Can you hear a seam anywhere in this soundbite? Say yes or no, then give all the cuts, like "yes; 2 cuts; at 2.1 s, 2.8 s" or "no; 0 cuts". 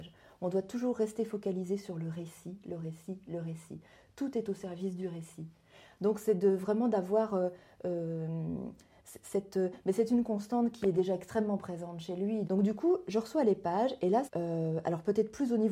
yes; 2 cuts; at 12.4 s, 14.3 s